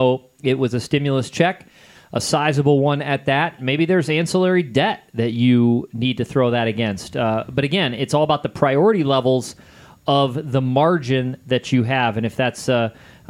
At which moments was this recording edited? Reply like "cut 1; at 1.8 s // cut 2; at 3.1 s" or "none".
cut 1; at 3.6 s